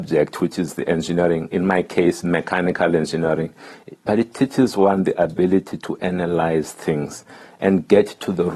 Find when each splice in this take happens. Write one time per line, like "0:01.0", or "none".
none